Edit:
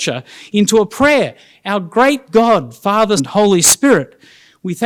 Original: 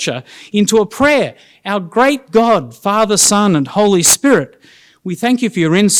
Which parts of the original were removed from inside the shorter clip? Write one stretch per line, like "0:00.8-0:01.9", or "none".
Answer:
0:03.2-0:03.6